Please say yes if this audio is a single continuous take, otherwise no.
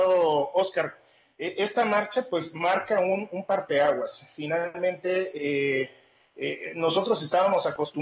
yes